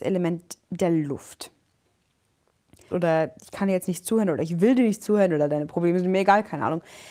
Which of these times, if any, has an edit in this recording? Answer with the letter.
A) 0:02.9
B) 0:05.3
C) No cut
A